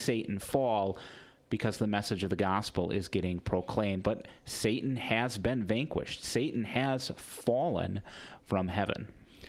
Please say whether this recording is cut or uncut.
cut